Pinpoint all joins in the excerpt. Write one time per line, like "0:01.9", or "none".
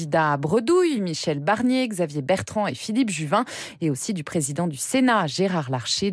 none